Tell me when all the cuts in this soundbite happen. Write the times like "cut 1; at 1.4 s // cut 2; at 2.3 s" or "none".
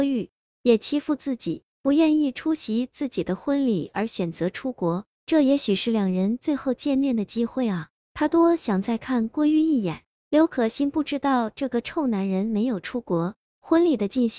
none